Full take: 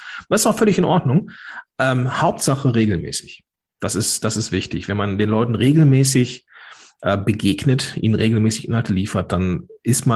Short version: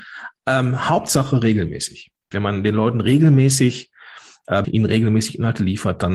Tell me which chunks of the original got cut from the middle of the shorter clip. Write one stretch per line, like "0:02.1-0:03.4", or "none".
0:03.6-0:04.9
0:07.2-0:07.9